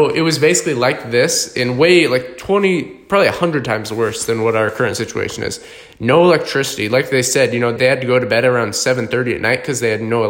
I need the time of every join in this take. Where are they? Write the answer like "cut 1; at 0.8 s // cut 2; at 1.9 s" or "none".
cut 1; at 7.8 s